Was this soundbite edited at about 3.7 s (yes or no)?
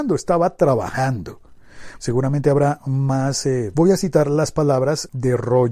yes